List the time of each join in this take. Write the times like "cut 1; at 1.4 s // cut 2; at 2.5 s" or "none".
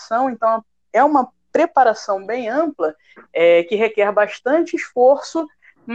none